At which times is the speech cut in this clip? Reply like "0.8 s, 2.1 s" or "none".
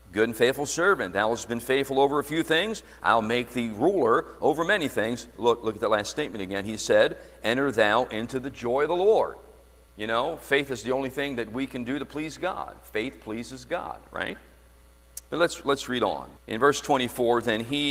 9.9 s, 16.4 s